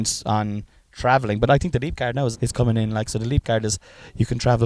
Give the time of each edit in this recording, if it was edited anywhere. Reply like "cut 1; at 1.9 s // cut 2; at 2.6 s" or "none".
cut 1; at 2.3 s

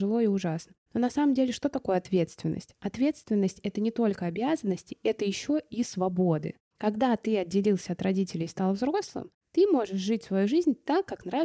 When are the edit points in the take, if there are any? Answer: none

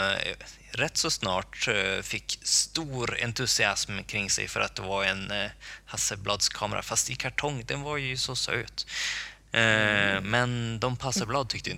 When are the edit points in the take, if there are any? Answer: none

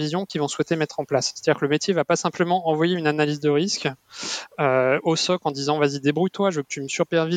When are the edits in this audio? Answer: none

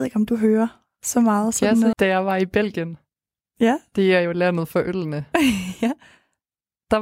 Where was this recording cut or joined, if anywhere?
cut 1; at 1.9 s

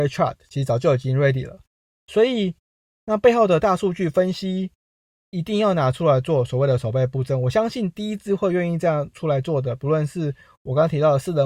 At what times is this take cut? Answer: cut 1; at 2.9 s

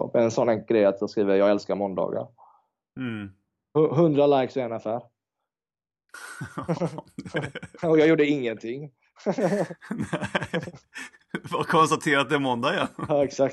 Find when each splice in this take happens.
none

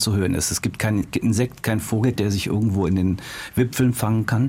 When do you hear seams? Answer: cut 1; at 2.2 s

